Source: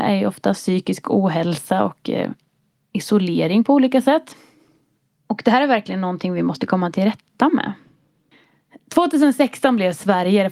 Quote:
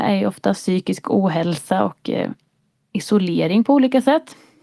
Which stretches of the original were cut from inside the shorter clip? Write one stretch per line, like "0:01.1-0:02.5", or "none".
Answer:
none